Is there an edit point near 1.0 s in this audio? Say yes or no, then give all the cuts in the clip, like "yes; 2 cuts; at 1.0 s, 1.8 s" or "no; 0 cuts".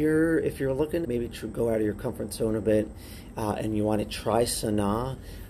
yes; 1 cut; at 1.0 s